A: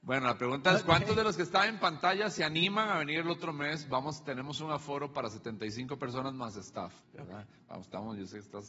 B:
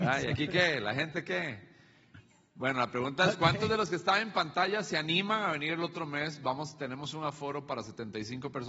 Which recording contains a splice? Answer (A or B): A